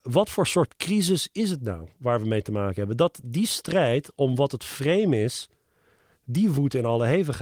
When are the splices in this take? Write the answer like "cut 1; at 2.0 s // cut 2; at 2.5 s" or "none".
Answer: none